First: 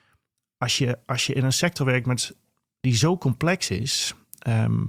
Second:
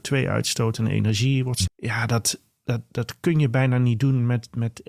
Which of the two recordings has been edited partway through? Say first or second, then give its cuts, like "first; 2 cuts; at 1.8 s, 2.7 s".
second; 1 cut; at 1.7 s